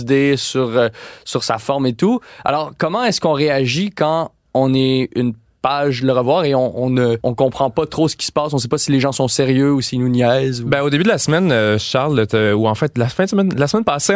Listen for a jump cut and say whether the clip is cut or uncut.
uncut